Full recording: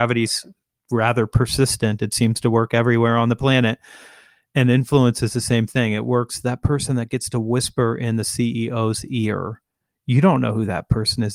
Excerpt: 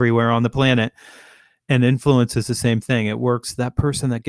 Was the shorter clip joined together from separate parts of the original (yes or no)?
no